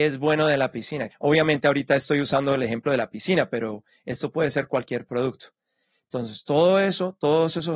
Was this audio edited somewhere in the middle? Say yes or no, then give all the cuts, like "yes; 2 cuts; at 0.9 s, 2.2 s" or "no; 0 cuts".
yes; 1 cut; at 1.1 s